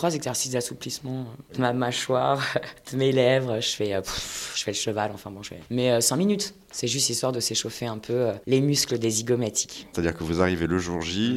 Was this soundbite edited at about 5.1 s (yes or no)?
no